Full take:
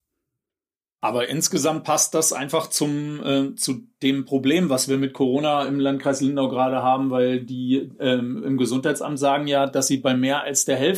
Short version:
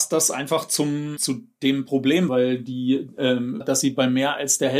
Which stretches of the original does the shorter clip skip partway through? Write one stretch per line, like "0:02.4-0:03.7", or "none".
0:03.2-0:03.6
0:04.7-0:07.1
0:08.4-0:09.7